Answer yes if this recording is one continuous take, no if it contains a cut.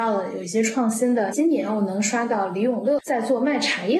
yes